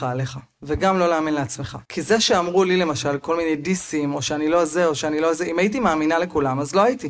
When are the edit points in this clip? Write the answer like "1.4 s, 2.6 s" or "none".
1.8 s